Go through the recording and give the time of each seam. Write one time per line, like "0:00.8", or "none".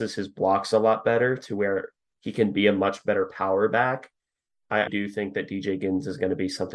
0:04.9